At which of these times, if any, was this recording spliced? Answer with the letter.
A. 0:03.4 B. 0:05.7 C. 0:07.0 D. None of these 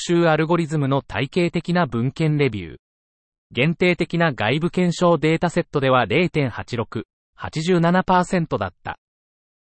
A